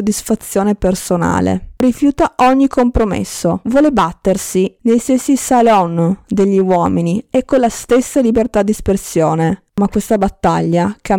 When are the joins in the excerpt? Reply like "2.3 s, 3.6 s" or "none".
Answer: 1.8 s